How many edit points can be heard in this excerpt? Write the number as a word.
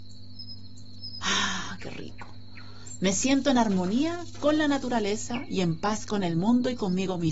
zero